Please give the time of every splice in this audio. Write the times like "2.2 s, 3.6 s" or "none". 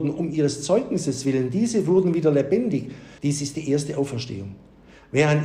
3.2 s